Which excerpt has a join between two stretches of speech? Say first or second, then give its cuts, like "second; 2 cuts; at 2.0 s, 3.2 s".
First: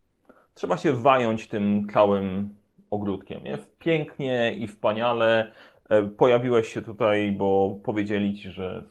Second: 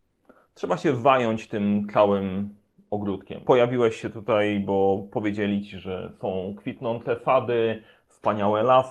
second; 1 cut; at 3.4 s